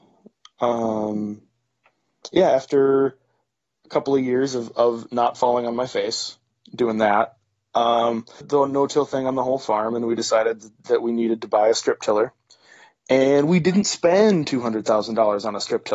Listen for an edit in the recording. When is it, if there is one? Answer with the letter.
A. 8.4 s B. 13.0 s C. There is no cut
A